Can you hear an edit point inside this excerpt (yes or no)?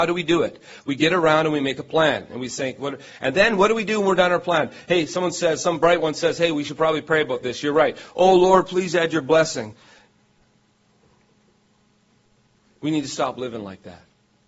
no